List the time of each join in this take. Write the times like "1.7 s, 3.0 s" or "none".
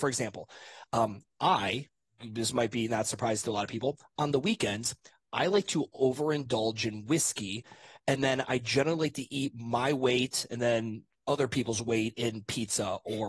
none